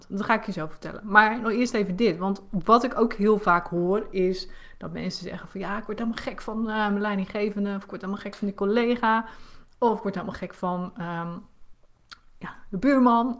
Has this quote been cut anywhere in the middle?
no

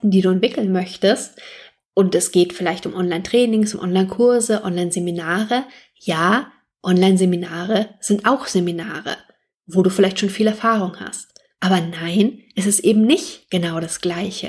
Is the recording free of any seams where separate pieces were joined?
yes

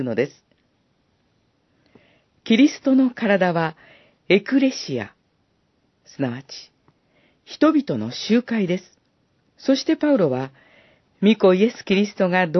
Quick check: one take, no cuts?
no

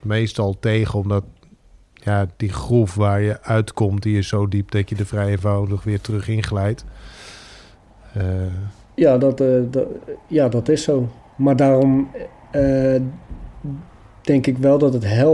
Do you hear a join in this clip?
no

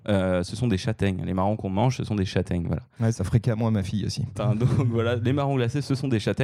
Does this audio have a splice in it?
yes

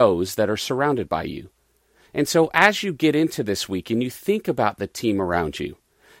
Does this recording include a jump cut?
no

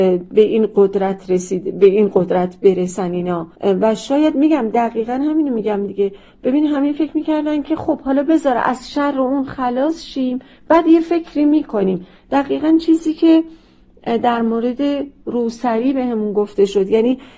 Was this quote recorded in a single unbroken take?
no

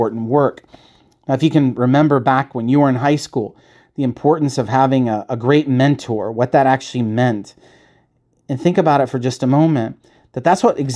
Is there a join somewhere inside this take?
no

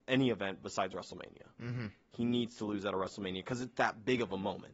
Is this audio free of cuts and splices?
yes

